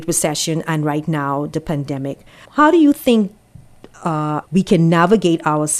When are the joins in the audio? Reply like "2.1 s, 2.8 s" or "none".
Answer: 2.4 s, 4.4 s